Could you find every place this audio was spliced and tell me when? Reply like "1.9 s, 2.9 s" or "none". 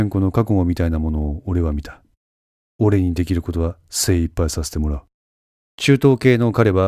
5.6 s